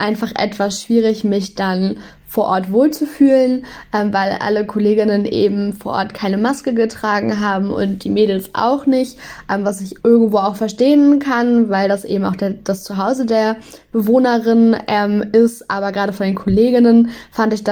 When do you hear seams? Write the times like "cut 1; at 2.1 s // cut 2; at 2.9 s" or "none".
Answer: cut 1; at 10.0 s